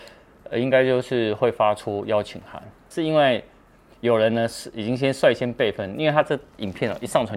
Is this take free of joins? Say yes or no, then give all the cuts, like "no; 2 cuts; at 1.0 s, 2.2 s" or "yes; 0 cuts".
no; 1 cut; at 2.9 s